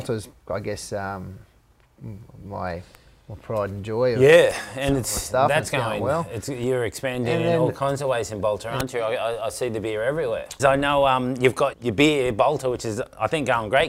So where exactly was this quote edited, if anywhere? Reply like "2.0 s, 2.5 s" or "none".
10.6 s, 11.7 s